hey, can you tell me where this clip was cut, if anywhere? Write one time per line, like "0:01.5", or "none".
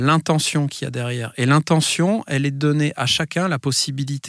none

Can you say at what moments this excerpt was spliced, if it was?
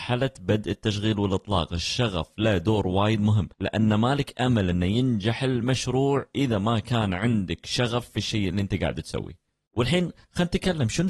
0:03.5

